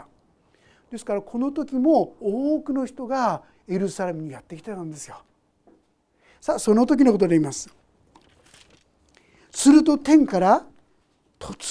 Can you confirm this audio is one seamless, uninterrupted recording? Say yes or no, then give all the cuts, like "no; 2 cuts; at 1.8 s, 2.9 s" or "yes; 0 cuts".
yes; 0 cuts